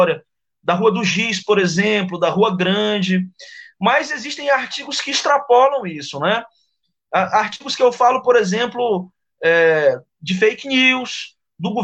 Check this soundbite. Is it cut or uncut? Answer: uncut